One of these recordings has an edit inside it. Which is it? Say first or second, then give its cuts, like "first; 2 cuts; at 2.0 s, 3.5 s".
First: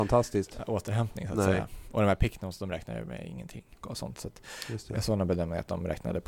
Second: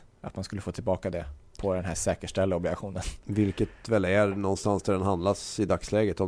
first; 1 cut; at 3.8 s